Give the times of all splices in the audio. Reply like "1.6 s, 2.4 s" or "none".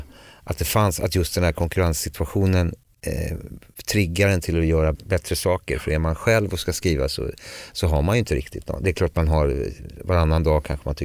4.9 s